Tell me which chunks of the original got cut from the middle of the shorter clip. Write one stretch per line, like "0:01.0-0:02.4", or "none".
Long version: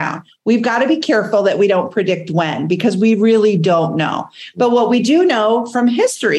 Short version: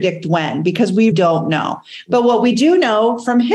0:03.2-0:03.6